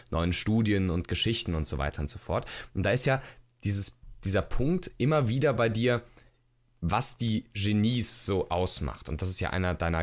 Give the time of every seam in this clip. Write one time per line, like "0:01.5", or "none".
none